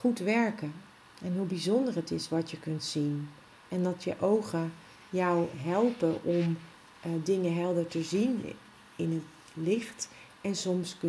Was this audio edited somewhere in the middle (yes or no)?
yes